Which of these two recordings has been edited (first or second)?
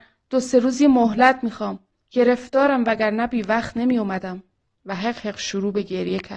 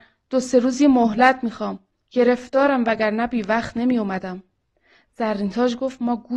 first